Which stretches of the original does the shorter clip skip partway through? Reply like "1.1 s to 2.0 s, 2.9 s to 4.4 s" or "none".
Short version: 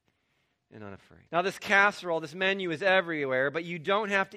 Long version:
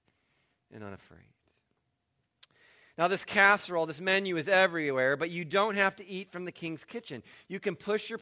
1.3 s to 2.9 s

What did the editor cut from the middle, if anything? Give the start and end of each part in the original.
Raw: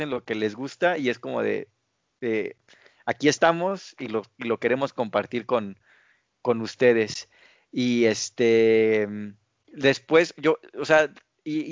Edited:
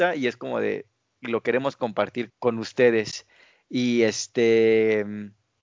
2.0 s to 4.3 s, 5.5 s to 6.3 s

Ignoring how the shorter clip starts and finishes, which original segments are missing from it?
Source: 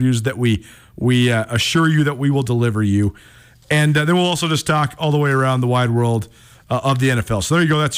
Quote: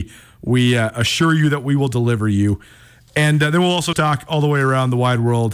4.5 s to 4.6 s

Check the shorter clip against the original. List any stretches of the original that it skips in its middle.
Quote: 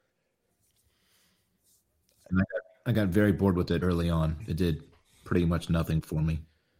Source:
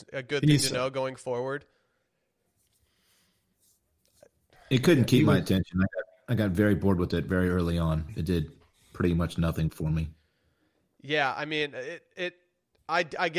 4.3 s to 5.7 s, 7.2 s to 7.5 s

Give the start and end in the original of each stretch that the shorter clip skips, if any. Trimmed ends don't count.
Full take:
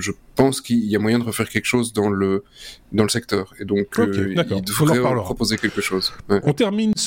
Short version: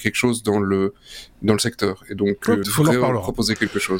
4.1 s to 4.7 s

